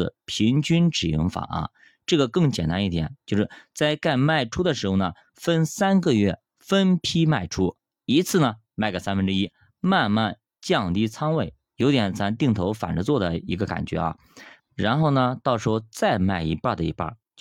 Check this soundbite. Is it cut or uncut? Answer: cut